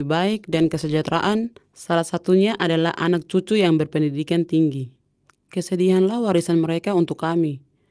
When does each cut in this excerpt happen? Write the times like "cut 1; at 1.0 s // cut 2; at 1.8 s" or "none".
none